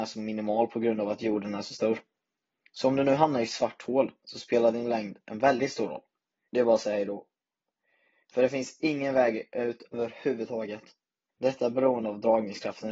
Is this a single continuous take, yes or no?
no